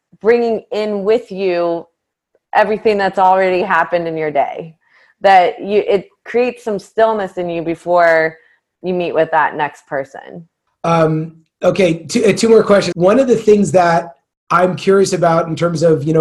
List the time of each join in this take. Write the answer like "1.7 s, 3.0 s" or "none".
10.7 s, 12.9 s